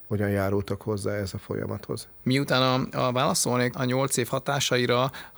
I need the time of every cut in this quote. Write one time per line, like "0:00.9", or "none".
0:03.7